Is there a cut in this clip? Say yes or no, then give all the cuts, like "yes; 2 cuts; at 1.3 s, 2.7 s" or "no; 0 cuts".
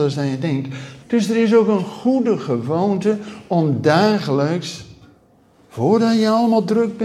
yes; 1 cut; at 1.0 s